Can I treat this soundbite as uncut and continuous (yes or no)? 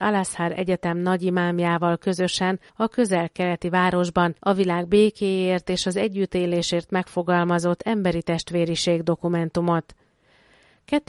no